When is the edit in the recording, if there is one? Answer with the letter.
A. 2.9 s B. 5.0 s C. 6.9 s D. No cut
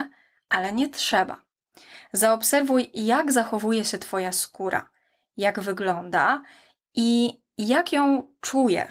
D